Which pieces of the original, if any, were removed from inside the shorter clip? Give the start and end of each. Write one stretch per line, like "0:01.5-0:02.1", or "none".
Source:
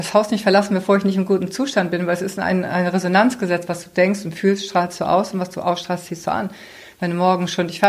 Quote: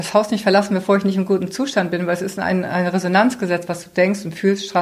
none